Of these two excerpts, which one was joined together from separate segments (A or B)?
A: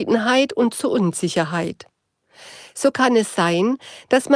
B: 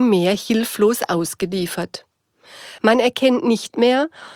B